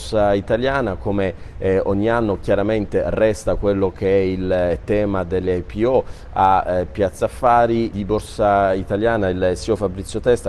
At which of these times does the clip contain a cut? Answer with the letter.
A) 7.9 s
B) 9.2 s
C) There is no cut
A